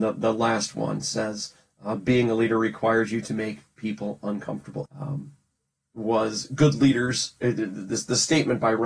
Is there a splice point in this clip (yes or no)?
yes